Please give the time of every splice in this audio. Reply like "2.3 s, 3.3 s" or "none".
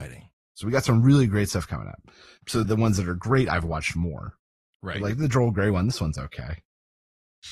2.6 s